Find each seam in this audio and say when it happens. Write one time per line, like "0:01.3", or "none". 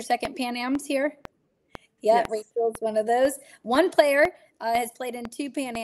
none